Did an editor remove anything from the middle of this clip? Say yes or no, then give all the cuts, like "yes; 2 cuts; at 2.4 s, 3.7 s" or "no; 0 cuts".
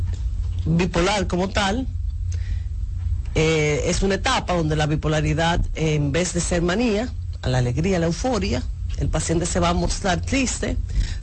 no; 0 cuts